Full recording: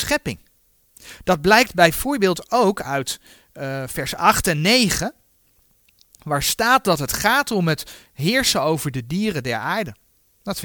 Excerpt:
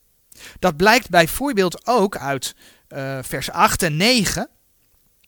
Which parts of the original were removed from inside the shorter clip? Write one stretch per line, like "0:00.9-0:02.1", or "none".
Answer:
none